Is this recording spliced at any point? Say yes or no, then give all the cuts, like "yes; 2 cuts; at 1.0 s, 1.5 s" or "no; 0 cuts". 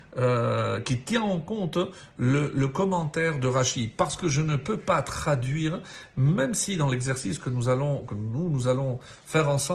no; 0 cuts